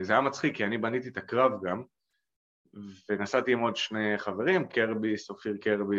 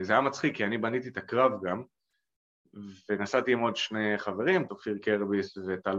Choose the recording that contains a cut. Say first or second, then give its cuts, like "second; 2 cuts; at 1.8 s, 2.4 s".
second; 1 cut; at 4.7 s